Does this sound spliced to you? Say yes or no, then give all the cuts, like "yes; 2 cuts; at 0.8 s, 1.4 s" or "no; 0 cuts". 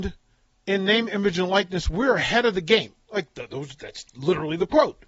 no; 0 cuts